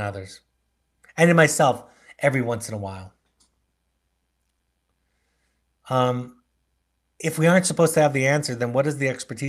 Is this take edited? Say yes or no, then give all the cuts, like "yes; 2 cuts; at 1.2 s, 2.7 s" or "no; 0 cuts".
no; 0 cuts